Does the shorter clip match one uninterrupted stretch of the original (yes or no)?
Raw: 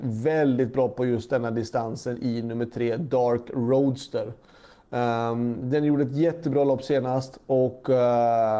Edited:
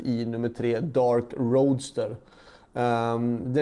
yes